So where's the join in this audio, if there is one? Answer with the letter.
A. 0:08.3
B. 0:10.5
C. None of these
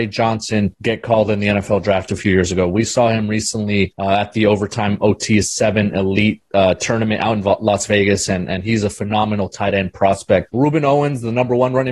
B